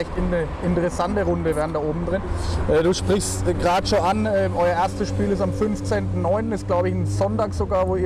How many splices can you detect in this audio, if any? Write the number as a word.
zero